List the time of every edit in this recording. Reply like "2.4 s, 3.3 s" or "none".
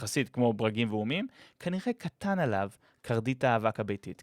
none